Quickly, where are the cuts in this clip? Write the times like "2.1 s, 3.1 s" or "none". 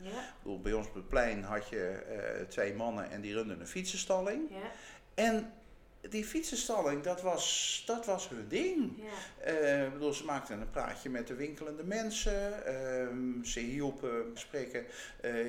14.4 s